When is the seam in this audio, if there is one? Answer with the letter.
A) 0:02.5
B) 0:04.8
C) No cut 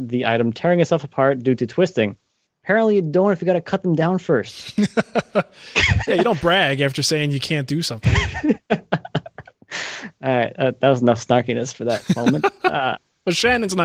A